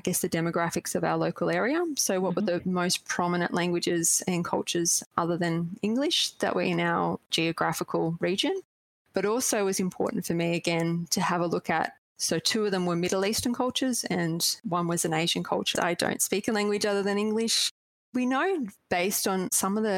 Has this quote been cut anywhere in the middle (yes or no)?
yes